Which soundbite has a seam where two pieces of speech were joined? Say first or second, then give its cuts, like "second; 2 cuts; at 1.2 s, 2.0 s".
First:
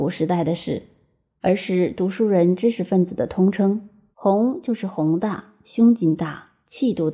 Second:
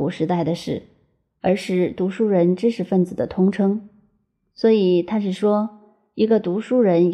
first; 1 cut; at 4.1 s